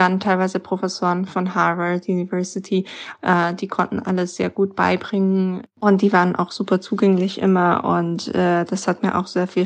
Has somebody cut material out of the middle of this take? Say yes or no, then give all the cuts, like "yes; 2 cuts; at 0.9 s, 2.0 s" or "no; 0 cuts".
yes; 1 cut; at 3.1 s